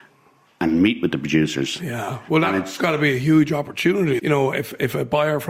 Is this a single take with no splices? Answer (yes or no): no